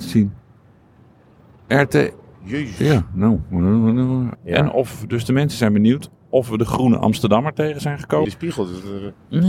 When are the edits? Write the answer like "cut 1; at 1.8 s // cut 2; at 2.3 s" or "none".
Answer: cut 1; at 4.3 s // cut 2; at 8.2 s